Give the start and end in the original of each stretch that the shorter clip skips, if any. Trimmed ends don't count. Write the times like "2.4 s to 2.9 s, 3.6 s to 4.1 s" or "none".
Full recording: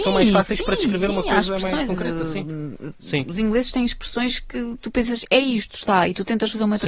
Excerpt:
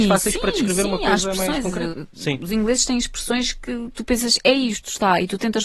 2.1 s to 2.8 s